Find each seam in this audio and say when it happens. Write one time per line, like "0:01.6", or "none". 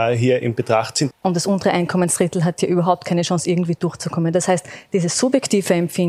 0:01.1